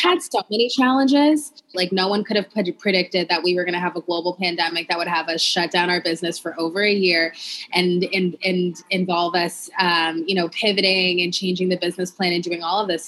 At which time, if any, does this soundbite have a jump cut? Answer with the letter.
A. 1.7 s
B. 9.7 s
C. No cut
A